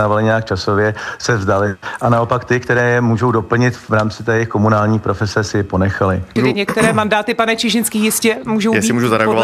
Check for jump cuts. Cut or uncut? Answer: cut